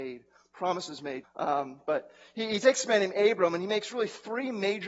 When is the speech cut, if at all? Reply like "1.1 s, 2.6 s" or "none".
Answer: 1.2 s